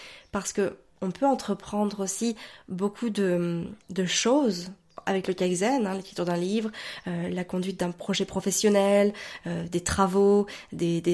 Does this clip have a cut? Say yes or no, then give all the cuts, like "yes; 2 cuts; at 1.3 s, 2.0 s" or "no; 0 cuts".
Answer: no; 0 cuts